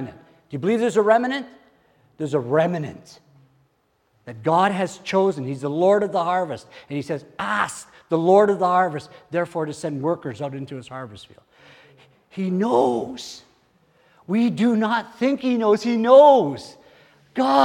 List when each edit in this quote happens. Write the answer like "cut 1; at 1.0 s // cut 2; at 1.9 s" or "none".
none